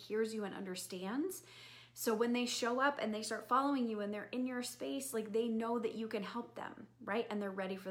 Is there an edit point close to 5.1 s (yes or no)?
no